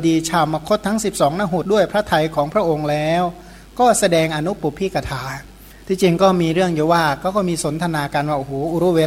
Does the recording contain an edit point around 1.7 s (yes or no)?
yes